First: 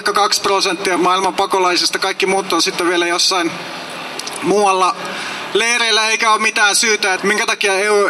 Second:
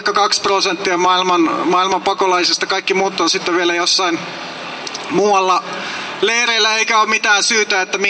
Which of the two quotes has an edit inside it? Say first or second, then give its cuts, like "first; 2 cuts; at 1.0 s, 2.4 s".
first; 2 cuts; at 1.0 s, 7.2 s